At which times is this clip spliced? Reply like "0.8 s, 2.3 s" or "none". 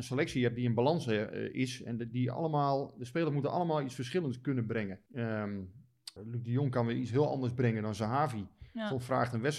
5.1 s, 6.2 s